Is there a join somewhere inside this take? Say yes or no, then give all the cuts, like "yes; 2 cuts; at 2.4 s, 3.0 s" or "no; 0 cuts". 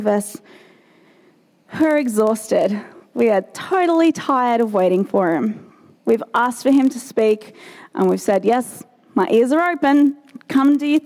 no; 0 cuts